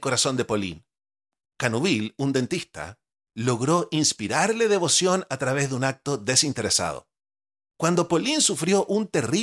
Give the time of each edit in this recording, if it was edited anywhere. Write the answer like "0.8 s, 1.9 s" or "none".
1.4 s